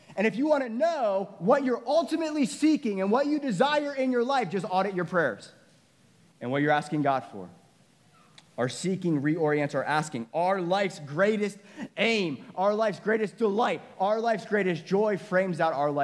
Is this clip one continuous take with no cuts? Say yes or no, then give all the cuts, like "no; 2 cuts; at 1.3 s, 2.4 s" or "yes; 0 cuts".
yes; 0 cuts